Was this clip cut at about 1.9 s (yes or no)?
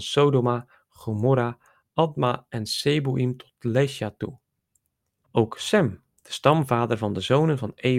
no